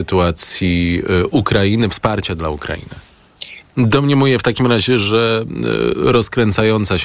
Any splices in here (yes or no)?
yes